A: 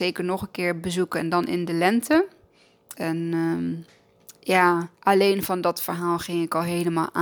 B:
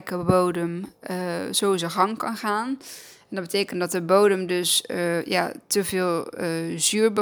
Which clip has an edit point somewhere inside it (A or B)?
A